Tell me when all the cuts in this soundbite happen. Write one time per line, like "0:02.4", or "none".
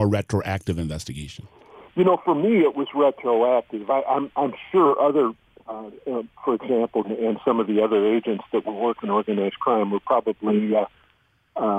0:07.0